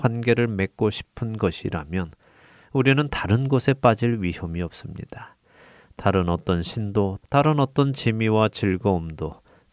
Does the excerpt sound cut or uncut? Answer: cut